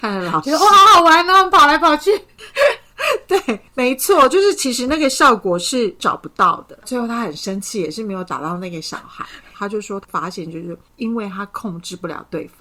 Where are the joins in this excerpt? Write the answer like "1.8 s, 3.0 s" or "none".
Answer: 6.8 s, 9.5 s